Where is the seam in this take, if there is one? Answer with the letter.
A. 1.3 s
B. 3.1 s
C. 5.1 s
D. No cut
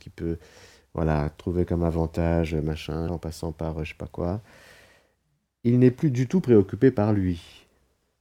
B